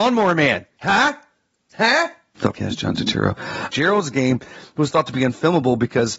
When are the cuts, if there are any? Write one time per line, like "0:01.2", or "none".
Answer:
0:02.5
0:03.7